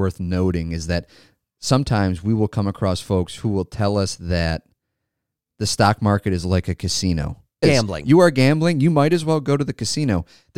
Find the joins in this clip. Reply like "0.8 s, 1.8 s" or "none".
7.6 s